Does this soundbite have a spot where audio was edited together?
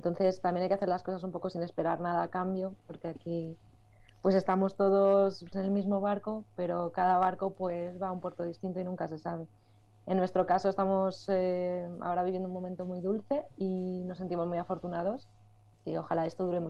yes; 1 cut; at 5.5 s

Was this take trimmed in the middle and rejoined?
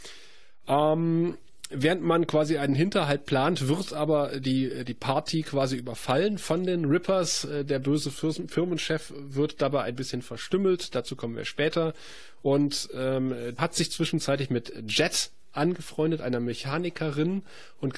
yes; 1 cut; at 13.6 s

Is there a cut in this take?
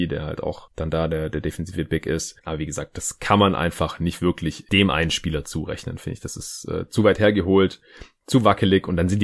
yes; 1 cut; at 2.4 s

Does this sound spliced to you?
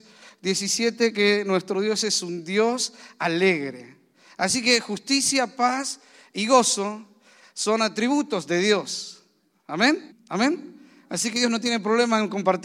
yes; 1 cut; at 10.1 s

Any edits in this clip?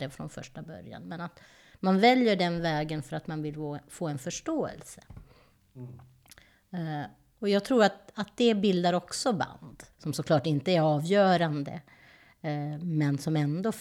yes; 1 cut; at 9.9 s

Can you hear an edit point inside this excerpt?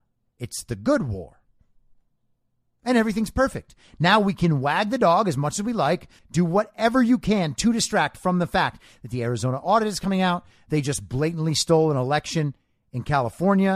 yes; 1 cut; at 6.2 s

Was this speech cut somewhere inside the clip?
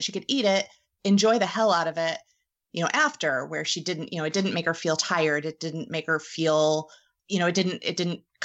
yes; 1 cut; at 2.6 s

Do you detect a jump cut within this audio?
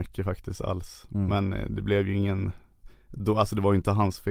no; 0 cuts

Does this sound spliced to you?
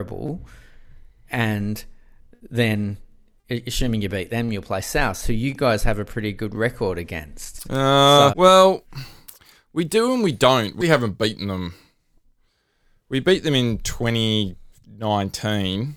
yes; 2 cuts; at 8.3 s, 10.8 s

